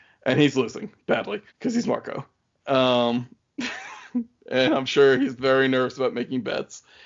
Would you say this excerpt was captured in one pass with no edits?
no; 1 cut; at 1.5 s

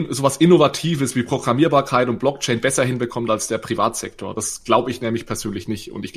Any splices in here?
no; 0 cuts

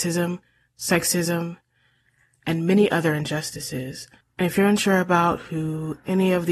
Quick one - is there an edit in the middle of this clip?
yes; 1 cut; at 4.2 s

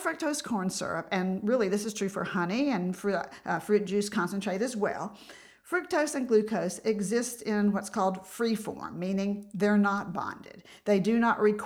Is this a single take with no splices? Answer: yes; 0 cuts

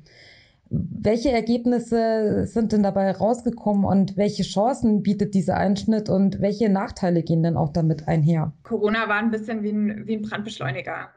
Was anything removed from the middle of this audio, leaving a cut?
no; 0 cuts

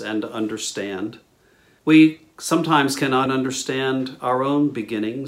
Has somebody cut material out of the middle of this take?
yes; 2 cuts; at 1.8 s, 3.3 s

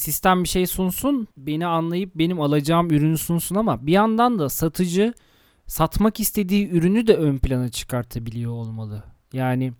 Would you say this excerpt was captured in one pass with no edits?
no; 1 cut; at 1.3 s

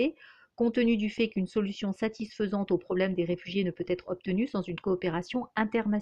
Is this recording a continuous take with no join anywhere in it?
yes; 0 cuts

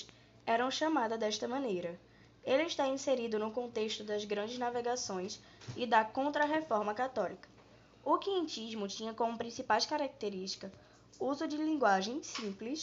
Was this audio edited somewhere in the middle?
no; 0 cuts

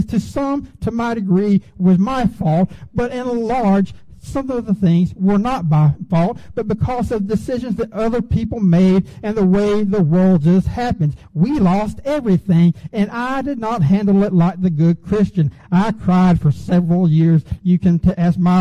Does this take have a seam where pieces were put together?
yes; 1 cut; at 15.6 s

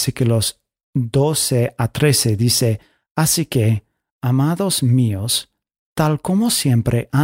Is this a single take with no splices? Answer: yes; 0 cuts

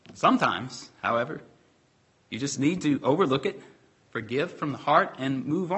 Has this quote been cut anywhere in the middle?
no; 0 cuts

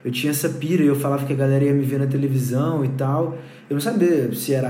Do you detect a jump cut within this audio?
no; 0 cuts

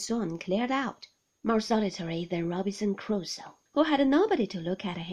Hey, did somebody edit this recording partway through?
yes; 2 cuts; at 1.3 s, 3.7 s

